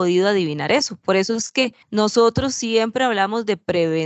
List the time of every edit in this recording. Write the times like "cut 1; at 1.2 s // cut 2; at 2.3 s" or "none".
cut 1; at 1.8 s